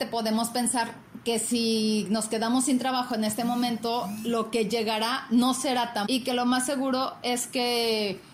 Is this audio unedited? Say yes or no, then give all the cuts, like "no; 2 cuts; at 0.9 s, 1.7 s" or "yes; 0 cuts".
no; 1 cut; at 6.1 s